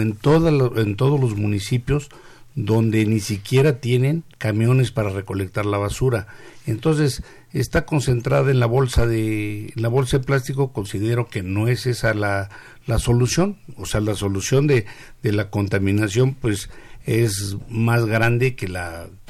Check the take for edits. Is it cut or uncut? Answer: cut